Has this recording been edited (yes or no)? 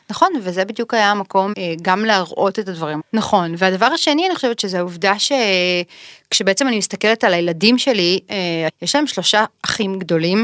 yes